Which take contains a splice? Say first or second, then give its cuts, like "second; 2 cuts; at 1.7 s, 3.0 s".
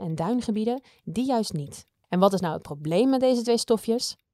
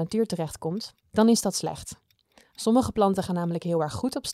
first; 1 cut; at 2.0 s